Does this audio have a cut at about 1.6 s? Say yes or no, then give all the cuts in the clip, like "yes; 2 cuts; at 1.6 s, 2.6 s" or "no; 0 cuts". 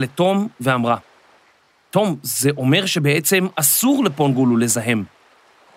no; 0 cuts